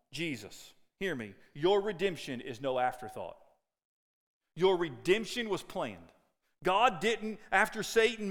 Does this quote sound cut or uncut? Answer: uncut